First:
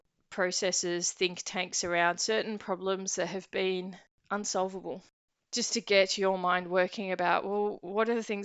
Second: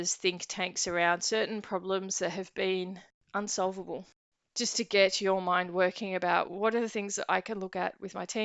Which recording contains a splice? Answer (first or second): second